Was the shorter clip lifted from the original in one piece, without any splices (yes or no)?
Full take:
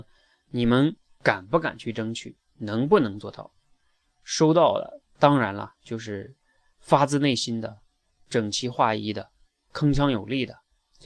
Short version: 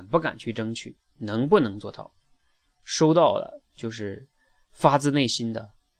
no